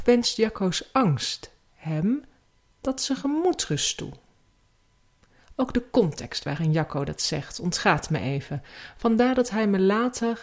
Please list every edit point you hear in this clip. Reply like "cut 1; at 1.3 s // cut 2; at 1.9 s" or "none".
none